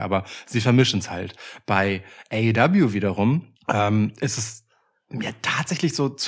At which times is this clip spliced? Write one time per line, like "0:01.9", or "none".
0:03.6